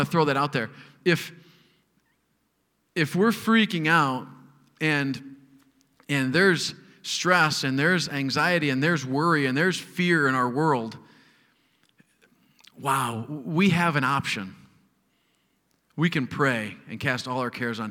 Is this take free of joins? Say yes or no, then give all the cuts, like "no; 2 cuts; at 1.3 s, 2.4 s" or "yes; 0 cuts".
yes; 0 cuts